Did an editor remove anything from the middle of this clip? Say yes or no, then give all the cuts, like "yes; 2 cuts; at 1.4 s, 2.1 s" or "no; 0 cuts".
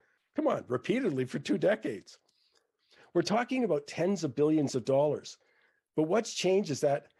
no; 0 cuts